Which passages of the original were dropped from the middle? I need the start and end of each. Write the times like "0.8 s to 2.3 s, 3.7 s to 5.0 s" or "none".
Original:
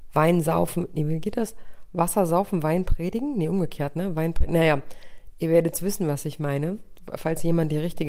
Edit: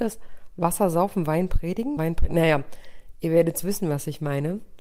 3.3 s to 4.2 s